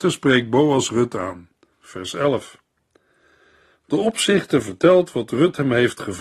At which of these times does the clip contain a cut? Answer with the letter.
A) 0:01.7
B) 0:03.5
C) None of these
A